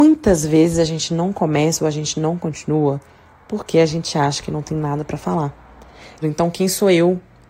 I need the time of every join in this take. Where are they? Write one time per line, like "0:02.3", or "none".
0:06.2